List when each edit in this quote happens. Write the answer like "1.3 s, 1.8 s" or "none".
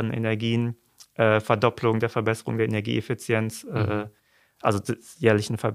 none